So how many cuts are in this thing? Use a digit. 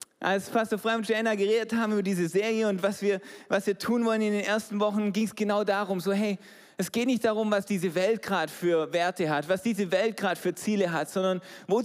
0